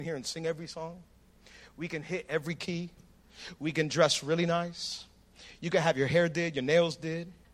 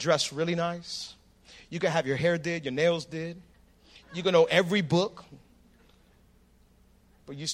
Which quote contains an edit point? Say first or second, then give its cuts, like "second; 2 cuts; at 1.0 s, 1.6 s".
second; 1 cut; at 4.0 s